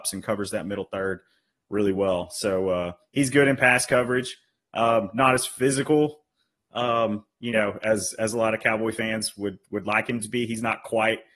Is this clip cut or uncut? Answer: uncut